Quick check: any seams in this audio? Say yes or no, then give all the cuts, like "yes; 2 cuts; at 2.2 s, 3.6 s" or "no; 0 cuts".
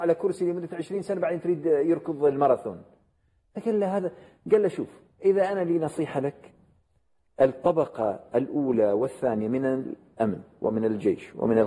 no; 0 cuts